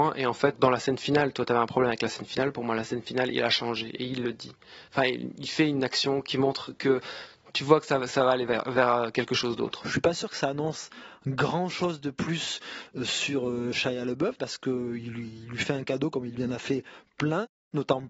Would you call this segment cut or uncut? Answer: uncut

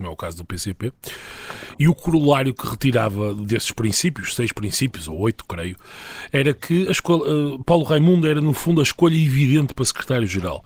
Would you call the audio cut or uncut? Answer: uncut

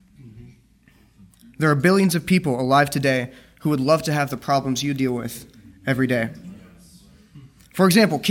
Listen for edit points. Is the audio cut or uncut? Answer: uncut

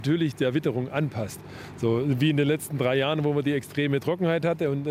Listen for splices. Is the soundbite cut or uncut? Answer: uncut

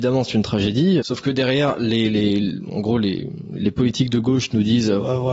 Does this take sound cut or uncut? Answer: cut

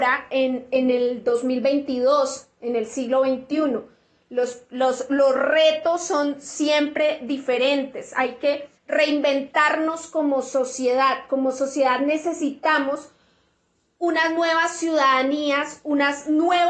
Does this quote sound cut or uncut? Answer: cut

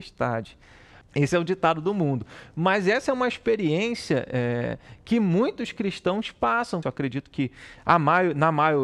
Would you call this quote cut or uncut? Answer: cut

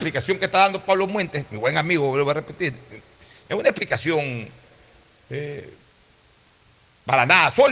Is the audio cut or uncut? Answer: uncut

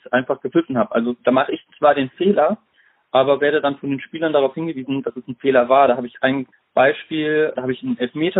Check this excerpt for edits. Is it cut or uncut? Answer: uncut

